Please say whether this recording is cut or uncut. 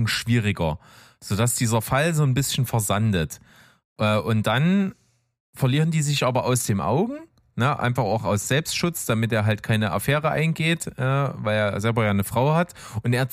uncut